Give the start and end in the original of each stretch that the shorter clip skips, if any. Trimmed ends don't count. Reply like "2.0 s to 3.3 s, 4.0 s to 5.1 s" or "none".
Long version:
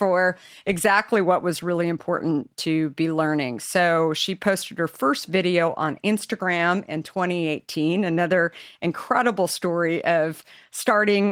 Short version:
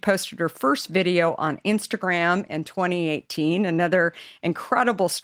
none